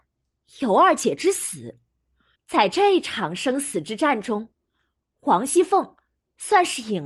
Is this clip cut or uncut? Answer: cut